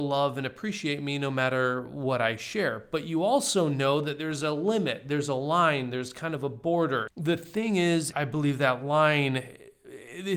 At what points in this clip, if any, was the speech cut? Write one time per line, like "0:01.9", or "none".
0:07.1
0:08.1